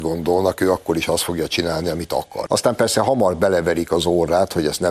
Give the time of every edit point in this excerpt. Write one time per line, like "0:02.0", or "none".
0:02.5